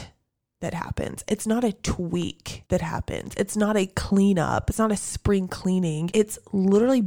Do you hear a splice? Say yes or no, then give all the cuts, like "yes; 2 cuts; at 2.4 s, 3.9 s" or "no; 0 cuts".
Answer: no; 0 cuts